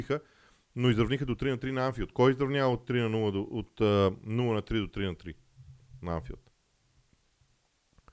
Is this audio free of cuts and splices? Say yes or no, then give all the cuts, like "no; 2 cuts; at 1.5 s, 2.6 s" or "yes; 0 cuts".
yes; 0 cuts